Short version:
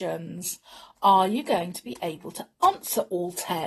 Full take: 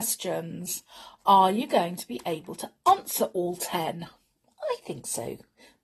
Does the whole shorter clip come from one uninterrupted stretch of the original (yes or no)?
yes